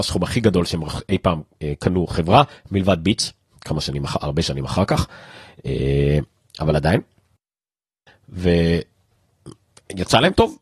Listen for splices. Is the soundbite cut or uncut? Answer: uncut